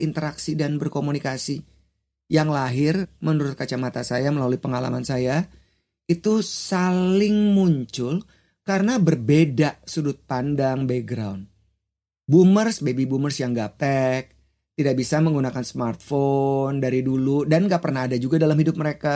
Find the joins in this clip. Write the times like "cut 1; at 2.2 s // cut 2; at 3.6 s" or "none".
none